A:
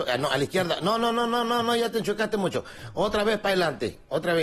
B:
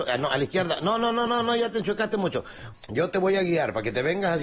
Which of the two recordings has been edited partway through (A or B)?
B